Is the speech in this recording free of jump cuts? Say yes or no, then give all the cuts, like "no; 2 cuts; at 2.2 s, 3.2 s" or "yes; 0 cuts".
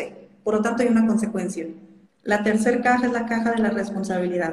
no; 1 cut; at 2.0 s